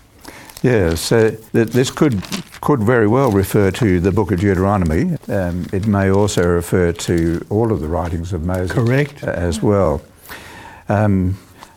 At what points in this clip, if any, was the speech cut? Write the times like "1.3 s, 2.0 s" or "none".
1.5 s, 5.2 s